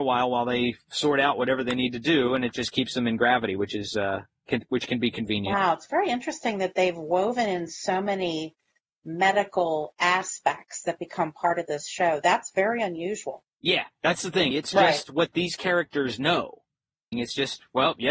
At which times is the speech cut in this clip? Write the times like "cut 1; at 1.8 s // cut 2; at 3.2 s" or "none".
cut 1; at 14.5 s // cut 2; at 17.1 s